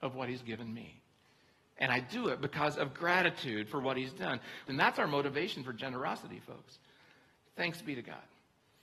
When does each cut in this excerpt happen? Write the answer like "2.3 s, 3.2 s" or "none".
4.7 s, 7.4 s